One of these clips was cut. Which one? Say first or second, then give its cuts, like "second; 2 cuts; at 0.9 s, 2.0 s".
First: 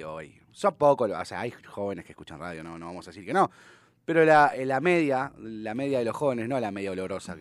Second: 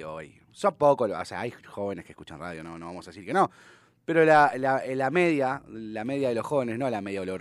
first; 1 cut; at 4.5 s